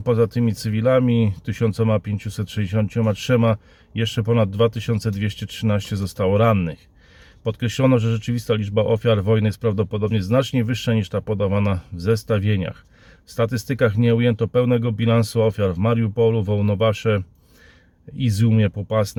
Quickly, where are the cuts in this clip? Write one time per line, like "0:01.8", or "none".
none